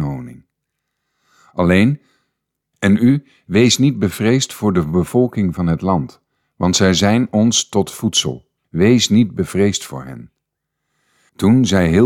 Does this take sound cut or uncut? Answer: cut